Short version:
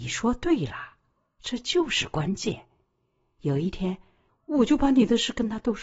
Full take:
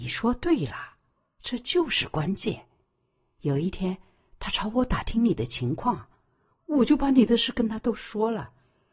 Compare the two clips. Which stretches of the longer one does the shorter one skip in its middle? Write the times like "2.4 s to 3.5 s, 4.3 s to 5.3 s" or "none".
4.3 s to 6.5 s